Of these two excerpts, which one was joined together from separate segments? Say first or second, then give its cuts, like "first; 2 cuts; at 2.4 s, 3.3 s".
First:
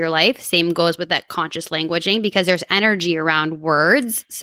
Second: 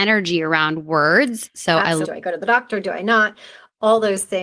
second; 1 cut; at 2.0 s